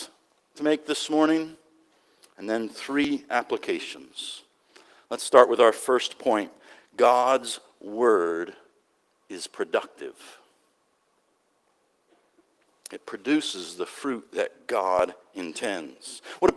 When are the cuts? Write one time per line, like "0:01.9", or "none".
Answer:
none